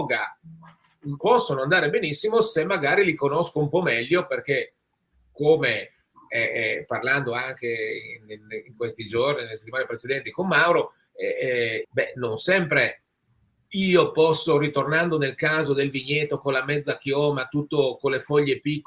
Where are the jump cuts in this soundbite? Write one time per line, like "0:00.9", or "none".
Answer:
0:01.2
0:11.8